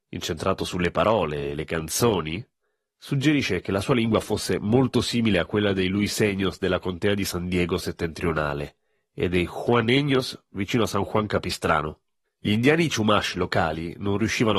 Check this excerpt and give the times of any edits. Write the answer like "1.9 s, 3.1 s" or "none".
12.2 s